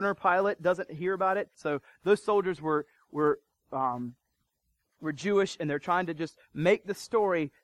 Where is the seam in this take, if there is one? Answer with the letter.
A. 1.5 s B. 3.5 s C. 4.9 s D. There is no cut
A